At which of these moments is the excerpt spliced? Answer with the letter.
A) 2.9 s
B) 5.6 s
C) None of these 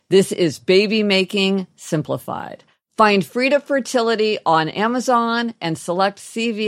B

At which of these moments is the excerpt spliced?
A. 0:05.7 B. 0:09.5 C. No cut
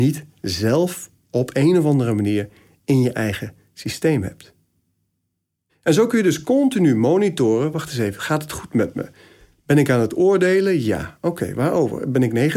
A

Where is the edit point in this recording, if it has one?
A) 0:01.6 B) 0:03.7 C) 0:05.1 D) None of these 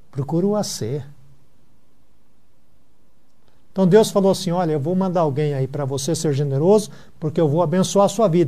B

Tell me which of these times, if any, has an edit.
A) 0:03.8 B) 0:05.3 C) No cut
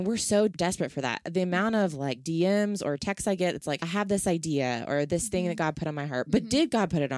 A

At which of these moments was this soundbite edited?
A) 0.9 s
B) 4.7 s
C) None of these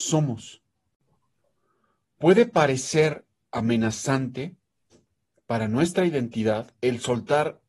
C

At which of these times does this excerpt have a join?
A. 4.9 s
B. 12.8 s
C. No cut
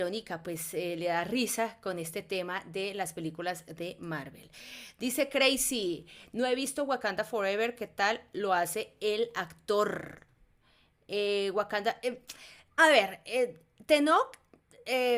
B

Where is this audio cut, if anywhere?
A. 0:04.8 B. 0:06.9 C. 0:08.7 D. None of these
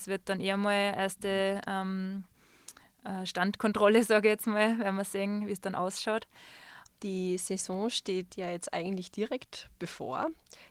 B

